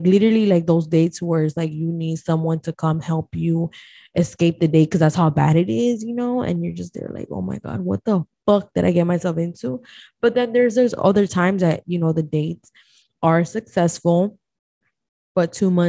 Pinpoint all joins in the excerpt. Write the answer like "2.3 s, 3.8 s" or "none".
none